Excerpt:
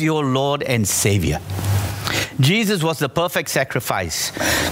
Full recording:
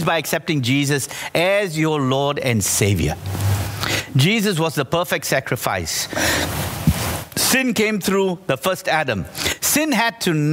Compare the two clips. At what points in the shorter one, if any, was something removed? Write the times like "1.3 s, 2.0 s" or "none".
none